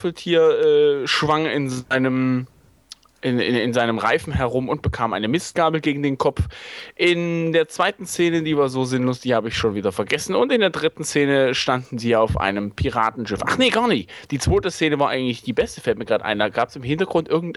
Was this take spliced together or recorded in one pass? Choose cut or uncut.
uncut